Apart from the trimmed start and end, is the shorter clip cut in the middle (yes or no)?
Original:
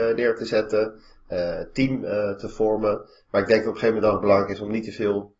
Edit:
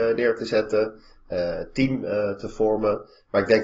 no